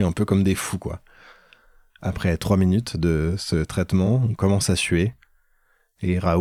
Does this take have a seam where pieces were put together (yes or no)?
no